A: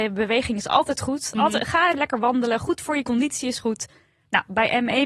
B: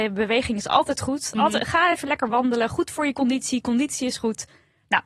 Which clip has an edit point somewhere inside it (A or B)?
A